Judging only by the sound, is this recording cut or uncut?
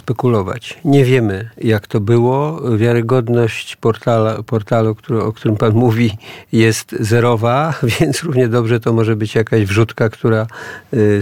uncut